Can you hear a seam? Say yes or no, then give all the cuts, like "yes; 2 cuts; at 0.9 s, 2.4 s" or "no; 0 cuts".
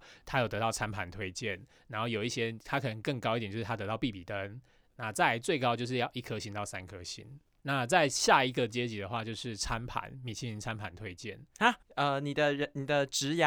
yes; 2 cuts; at 7.6 s, 11.8 s